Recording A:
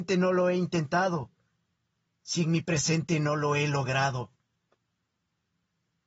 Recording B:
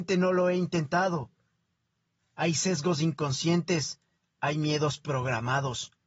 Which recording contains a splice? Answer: B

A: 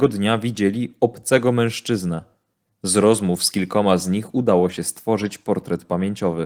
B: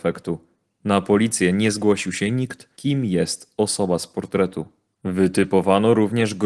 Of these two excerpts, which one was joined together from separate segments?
B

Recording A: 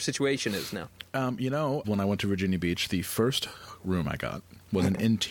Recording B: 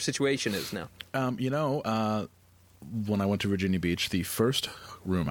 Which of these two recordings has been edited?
A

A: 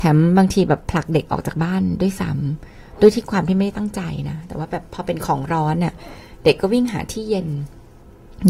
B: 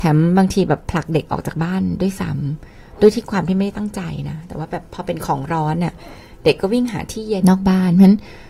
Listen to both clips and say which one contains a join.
B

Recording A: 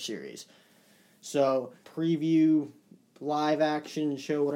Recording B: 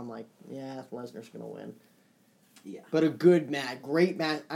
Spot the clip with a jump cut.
A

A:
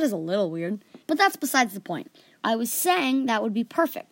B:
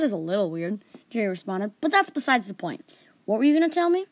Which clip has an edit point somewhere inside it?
A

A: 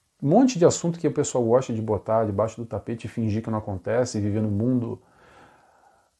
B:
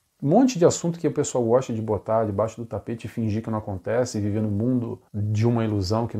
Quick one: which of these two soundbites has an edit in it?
B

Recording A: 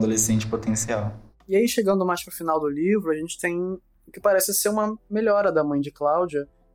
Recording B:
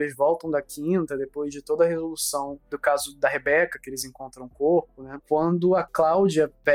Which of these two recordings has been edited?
B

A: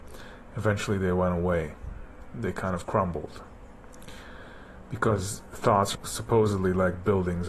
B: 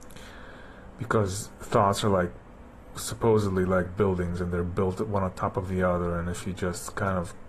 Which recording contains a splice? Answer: A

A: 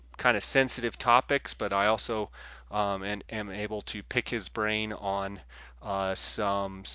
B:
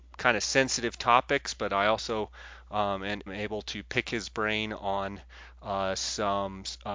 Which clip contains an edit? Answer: B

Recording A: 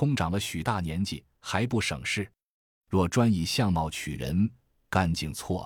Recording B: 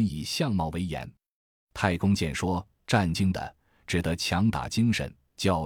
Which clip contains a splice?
B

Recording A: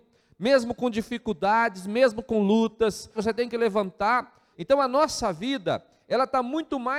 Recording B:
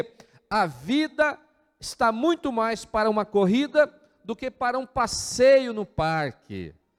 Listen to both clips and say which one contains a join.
A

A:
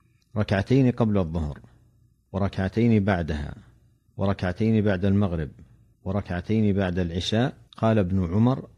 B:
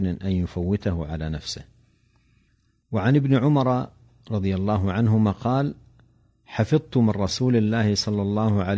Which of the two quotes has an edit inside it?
A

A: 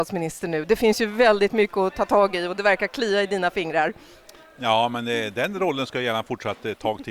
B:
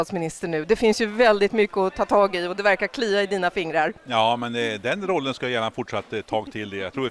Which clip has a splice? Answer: B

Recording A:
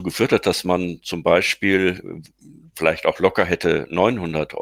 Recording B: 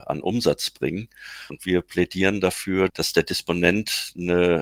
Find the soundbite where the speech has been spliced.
B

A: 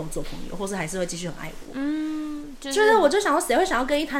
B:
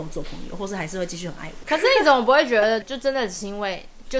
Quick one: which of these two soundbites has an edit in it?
B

